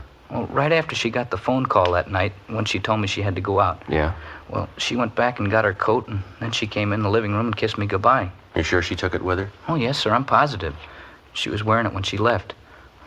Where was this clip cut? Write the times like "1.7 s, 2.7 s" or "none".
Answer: 8.5 s, 11.2 s

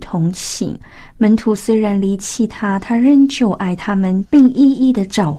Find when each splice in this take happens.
4.3 s

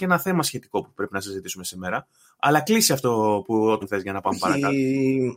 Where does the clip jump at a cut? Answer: 3.8 s

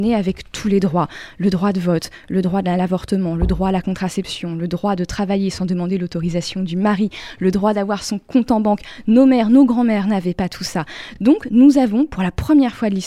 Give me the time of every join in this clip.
none

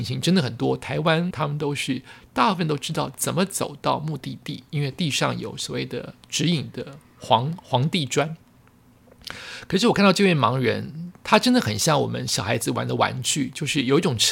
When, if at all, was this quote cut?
1.3 s

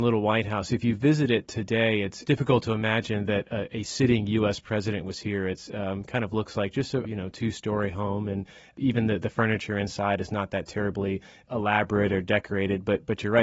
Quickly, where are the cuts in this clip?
7.0 s

